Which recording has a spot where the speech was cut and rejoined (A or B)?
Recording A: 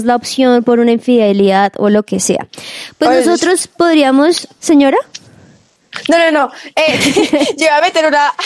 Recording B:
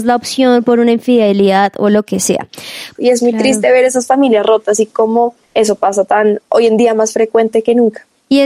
B